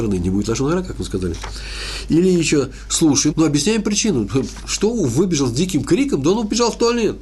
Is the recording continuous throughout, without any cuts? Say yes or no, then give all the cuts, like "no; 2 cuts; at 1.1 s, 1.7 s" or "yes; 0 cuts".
no; 1 cut; at 3.3 s